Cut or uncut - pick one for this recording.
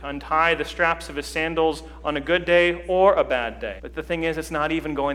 cut